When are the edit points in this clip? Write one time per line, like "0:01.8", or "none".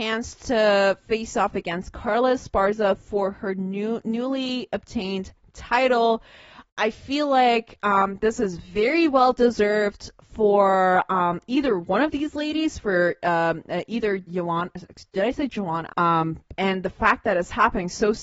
0:14.3
0:15.9